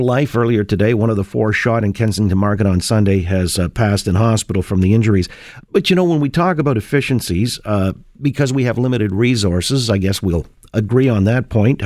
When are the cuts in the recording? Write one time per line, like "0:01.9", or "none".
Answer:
none